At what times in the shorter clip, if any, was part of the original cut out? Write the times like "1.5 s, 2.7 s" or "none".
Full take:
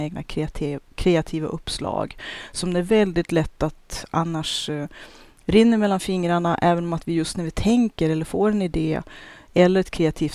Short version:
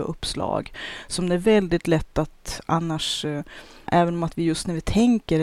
3.9 s